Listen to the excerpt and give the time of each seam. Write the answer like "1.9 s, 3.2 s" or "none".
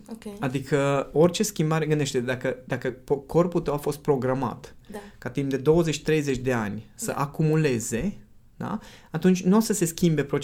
none